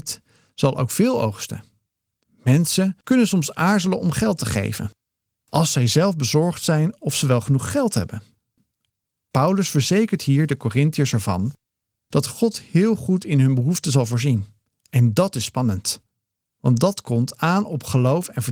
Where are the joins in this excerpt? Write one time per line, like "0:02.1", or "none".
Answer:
none